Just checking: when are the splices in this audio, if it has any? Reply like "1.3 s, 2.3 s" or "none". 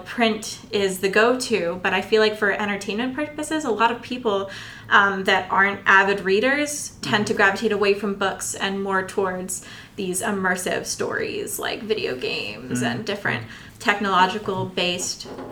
none